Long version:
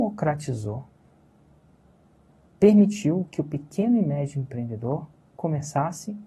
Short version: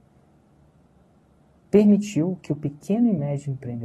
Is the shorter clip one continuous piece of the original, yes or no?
yes